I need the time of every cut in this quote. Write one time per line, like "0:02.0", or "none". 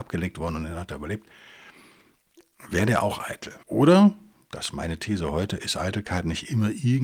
0:03.6